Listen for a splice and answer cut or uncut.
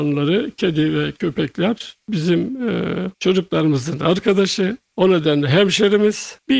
cut